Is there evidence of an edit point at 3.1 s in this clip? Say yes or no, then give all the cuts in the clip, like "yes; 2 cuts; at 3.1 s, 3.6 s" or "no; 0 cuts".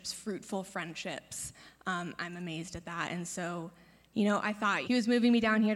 no; 1 cut; at 4.8 s